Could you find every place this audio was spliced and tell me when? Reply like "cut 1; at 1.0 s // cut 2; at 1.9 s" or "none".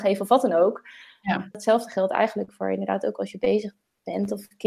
cut 1; at 1.5 s

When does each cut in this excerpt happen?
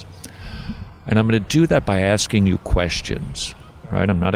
none

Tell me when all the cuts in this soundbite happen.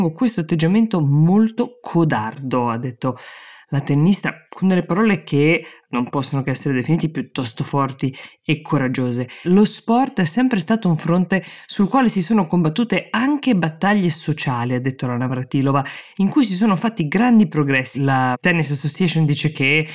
cut 1; at 9.4 s // cut 2; at 17.9 s

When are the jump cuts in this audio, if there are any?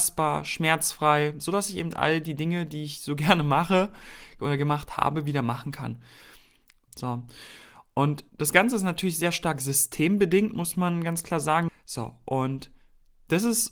cut 1; at 6.9 s // cut 2; at 11.7 s

